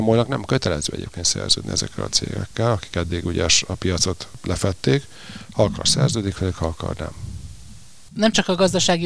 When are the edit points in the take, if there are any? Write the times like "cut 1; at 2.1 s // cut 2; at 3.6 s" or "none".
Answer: none